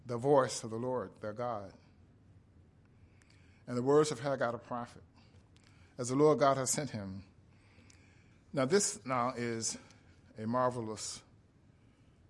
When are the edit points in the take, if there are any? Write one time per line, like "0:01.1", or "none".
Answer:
0:08.3